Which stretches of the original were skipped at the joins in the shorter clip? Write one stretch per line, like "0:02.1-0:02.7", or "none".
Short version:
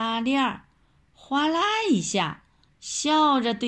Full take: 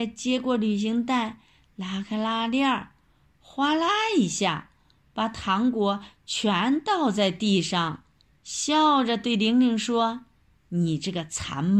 0:05.0-0:08.3